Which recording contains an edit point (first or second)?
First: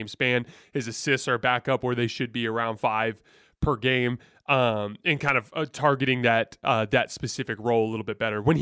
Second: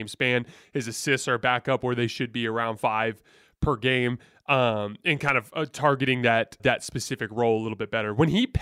second